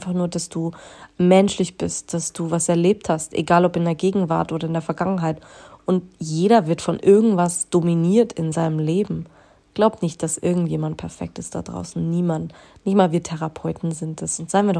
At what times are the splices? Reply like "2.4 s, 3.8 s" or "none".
none